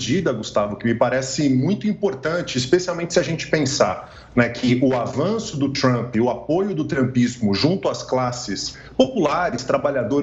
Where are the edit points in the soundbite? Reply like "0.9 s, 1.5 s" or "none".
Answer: none